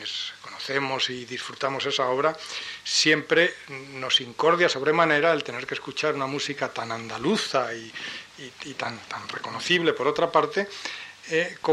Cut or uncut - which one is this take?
uncut